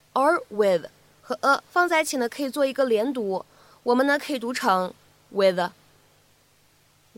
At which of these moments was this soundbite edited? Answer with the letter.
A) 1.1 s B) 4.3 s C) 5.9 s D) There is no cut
D